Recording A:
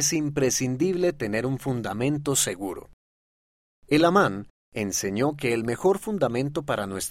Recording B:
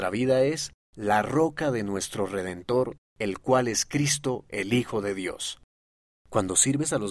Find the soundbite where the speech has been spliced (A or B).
B